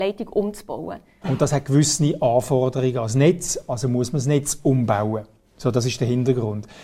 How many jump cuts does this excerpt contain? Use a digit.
1